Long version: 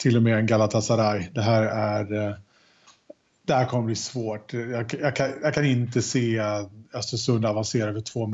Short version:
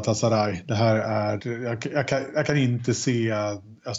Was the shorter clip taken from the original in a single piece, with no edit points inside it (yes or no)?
no